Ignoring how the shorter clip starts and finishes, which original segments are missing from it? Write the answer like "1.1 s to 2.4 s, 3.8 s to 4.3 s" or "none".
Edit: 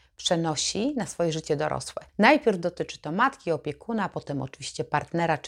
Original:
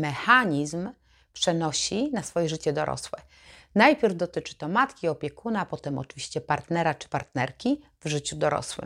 3.3 s to 3.7 s